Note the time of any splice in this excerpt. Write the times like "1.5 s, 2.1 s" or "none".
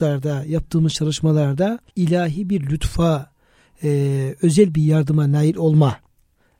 1.9 s